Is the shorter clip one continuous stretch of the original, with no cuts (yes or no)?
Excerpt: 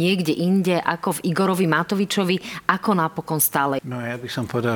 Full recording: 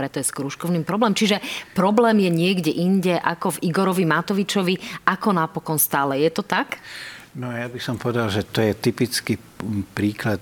no